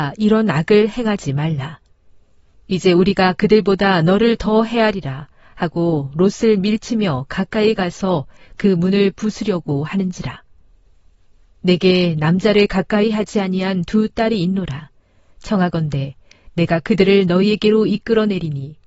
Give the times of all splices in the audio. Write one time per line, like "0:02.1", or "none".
0:02.5
0:11.6